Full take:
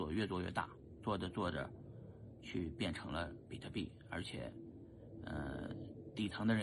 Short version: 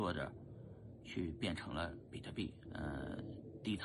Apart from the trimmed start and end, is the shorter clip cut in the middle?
yes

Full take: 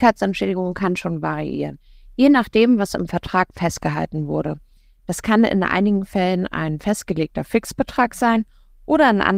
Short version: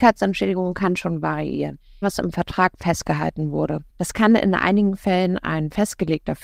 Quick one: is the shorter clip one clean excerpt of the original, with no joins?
no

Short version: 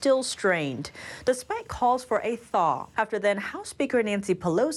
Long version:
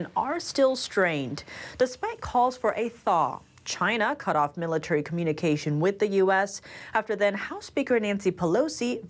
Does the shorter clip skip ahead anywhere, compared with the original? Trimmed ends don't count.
yes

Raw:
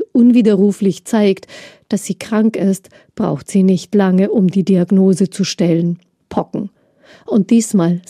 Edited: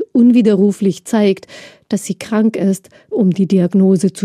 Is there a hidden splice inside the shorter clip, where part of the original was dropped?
yes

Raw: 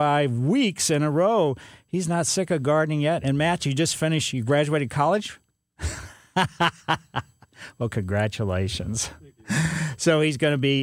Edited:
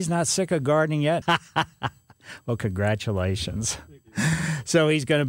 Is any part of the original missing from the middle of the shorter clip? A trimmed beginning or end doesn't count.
yes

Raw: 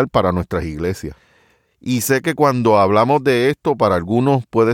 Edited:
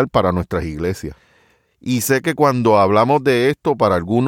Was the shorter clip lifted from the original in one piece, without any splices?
yes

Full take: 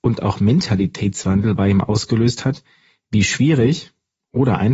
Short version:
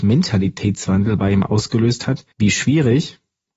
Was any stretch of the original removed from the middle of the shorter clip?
yes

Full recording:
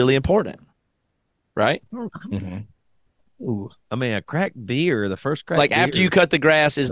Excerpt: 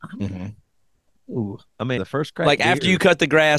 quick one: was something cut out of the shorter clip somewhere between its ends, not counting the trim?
yes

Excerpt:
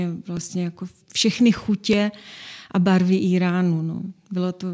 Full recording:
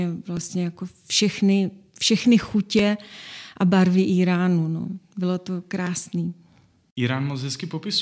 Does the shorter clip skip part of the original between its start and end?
yes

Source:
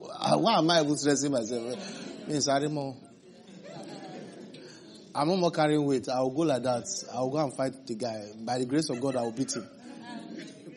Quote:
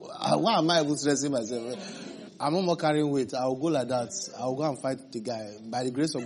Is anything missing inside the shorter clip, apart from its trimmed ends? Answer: yes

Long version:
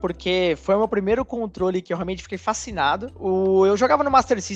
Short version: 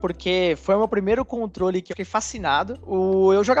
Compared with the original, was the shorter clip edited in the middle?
yes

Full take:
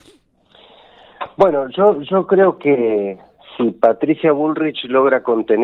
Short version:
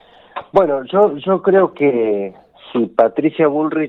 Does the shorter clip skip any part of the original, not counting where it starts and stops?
no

